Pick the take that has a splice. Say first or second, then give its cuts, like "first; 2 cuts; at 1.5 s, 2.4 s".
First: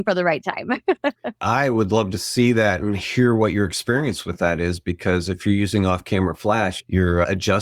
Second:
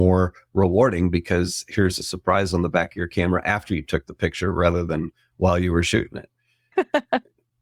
second; 1 cut; at 6.7 s